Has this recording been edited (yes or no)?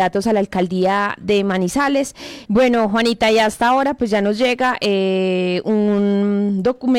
yes